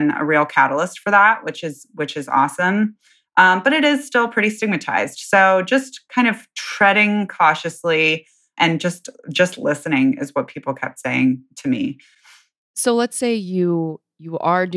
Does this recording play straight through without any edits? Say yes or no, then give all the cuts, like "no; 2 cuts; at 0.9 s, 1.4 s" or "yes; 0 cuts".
yes; 0 cuts